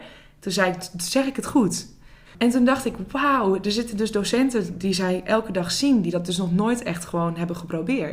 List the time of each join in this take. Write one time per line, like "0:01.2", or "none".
0:02.2